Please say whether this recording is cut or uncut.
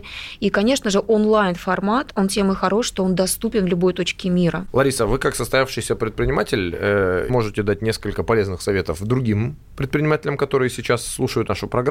cut